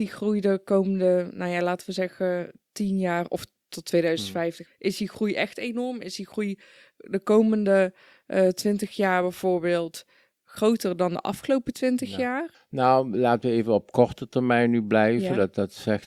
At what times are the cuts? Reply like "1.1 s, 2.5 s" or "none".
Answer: 4.7 s, 12.5 s